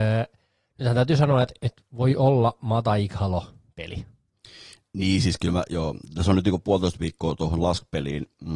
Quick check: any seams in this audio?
no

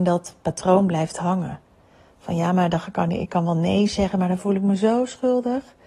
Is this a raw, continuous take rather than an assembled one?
yes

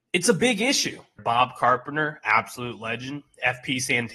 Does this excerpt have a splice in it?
yes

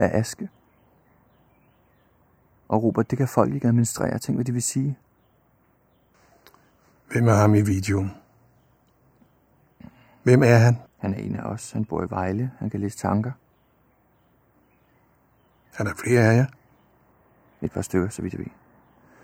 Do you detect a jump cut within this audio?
no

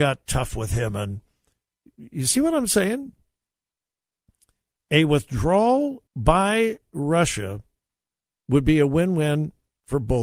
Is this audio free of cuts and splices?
no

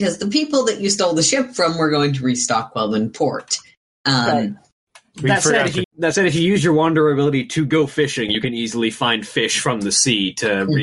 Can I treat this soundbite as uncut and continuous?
no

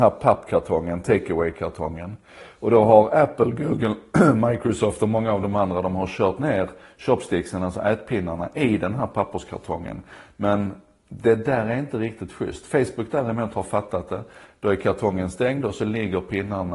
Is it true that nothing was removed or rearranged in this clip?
yes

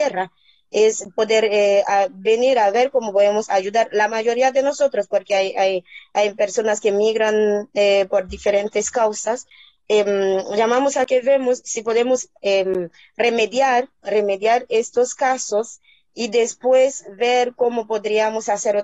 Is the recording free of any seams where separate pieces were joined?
yes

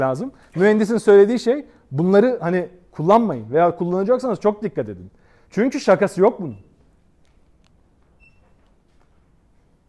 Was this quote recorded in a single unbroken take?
yes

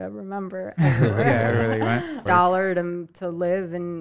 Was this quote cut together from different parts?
yes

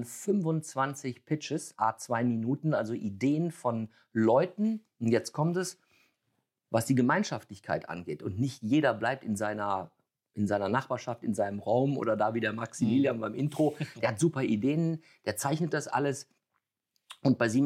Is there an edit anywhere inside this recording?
no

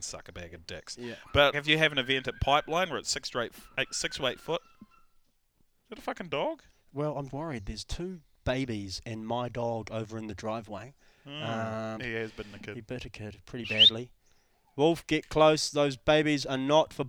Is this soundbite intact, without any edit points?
no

